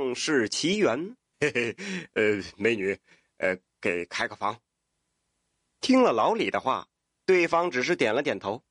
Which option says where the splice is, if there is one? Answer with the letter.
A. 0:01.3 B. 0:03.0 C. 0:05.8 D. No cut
A